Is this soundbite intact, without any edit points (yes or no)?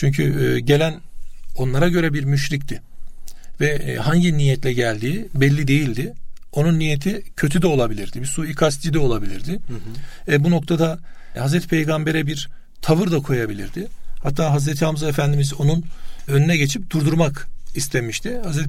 yes